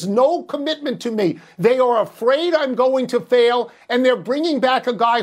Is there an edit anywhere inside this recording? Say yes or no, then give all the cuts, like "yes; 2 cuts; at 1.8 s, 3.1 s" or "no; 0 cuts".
no; 0 cuts